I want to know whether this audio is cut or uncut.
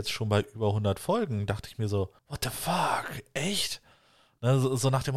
cut